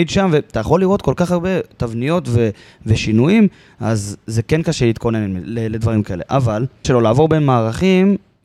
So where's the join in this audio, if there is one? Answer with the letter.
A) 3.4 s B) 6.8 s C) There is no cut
B